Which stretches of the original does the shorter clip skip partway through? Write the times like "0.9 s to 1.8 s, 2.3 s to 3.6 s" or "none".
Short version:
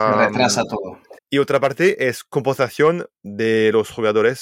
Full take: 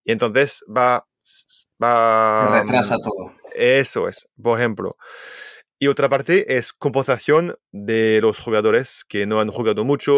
3.5 s to 5.6 s